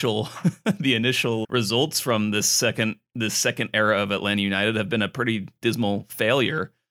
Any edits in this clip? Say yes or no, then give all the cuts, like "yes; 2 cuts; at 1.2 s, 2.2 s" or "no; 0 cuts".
yes; 1 cut; at 1.4 s